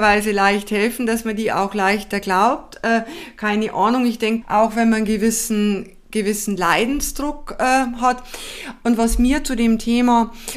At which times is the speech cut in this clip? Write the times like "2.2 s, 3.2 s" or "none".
4.4 s